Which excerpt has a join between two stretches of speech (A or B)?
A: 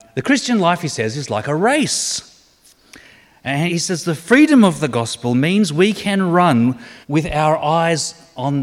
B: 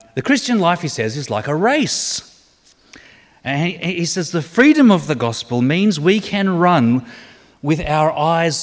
A